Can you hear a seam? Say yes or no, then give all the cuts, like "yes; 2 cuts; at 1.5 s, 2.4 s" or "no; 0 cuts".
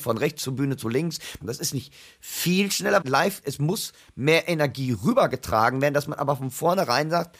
yes; 2 cuts; at 1.4 s, 3.0 s